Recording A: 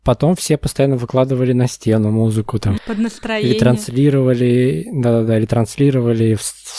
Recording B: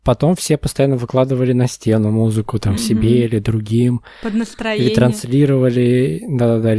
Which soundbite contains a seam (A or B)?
A